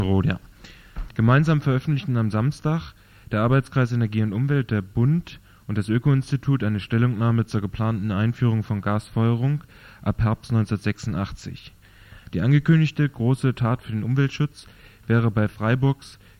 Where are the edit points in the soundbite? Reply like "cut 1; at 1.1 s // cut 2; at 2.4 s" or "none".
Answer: cut 1; at 1.1 s